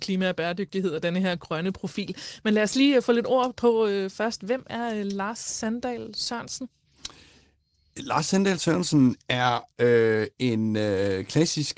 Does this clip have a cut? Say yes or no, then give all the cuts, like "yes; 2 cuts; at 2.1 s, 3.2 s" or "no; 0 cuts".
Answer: no; 0 cuts